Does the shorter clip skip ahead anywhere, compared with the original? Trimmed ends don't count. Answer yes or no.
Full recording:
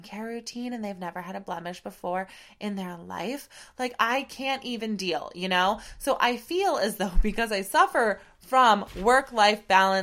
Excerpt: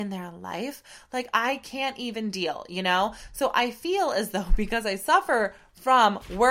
no